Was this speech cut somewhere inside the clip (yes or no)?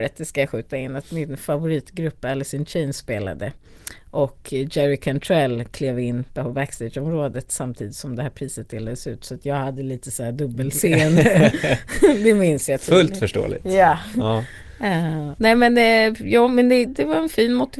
yes